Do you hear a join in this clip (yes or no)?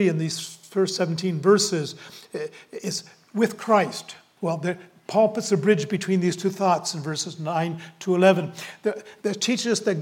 yes